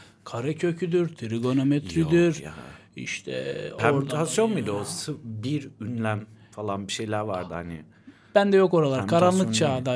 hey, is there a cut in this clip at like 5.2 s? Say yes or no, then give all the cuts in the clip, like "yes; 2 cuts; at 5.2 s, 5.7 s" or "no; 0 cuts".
no; 0 cuts